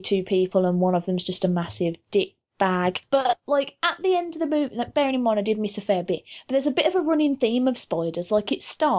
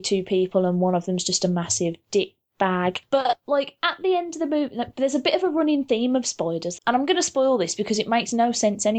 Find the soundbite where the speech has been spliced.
second; 2 cuts; at 4.9 s, 6.8 s

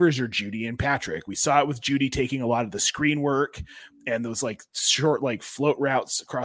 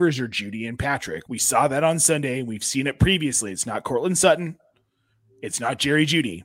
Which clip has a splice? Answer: second; 1 cut; at 1.3 s

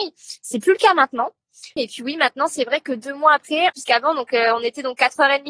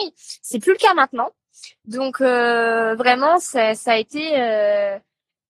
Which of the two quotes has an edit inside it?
first; 2 cuts; at 1.8 s, 3.7 s

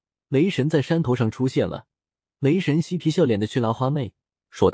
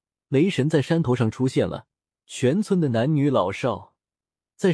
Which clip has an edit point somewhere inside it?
second; 1 cut; at 2.2 s

